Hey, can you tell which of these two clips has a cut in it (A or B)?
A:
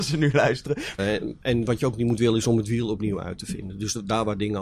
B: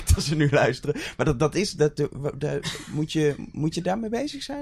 A